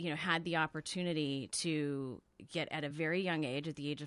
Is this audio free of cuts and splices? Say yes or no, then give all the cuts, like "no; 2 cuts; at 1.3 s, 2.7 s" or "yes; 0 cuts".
yes; 0 cuts